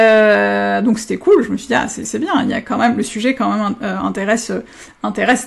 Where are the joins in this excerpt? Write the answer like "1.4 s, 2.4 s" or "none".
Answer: none